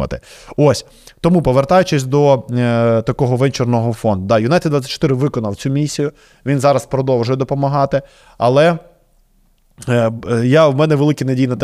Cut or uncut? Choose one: uncut